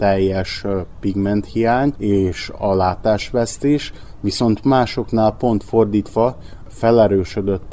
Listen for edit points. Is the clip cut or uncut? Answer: uncut